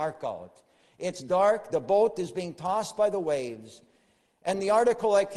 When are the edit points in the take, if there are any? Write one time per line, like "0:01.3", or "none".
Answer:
none